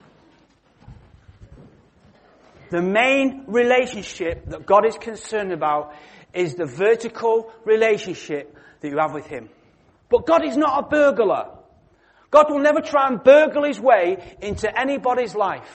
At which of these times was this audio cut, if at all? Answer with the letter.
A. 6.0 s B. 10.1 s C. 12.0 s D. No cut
B